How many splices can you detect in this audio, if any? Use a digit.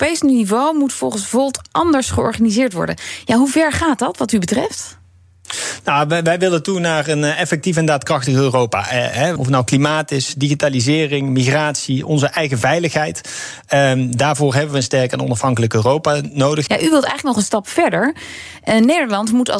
2